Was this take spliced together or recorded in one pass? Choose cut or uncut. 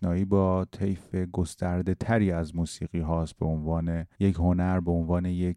cut